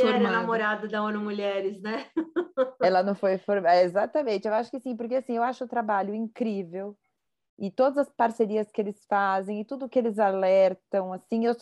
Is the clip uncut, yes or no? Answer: yes